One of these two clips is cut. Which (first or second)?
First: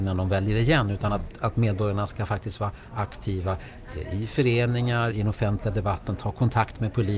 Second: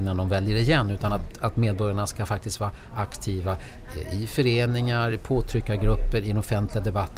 first